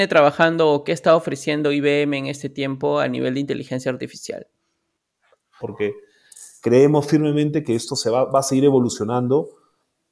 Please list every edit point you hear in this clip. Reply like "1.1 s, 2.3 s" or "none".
5.6 s